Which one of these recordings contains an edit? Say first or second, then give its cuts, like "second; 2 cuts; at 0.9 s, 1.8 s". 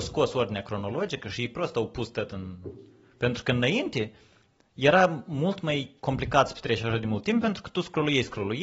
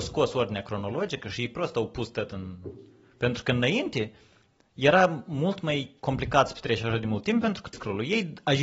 second; 1 cut; at 7.7 s